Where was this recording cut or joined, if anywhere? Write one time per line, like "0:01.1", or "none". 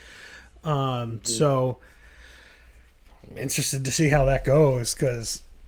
none